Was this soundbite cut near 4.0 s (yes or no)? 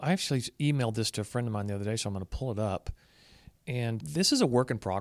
yes